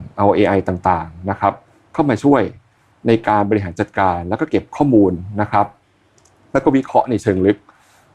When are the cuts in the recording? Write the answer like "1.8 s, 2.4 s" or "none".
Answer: none